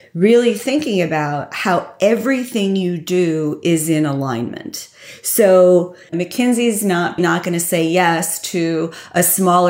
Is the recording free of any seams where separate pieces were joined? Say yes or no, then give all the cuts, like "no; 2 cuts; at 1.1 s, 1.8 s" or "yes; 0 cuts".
no; 2 cuts; at 6.1 s, 7.2 s